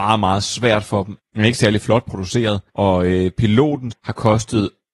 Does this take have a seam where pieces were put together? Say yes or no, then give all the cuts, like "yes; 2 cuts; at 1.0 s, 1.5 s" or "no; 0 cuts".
yes; 3 cuts; at 1.2 s, 2.7 s, 3.9 s